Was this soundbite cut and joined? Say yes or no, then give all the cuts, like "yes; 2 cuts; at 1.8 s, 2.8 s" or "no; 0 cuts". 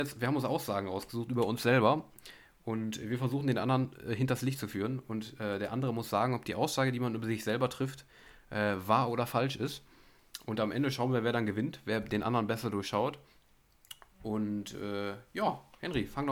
no; 0 cuts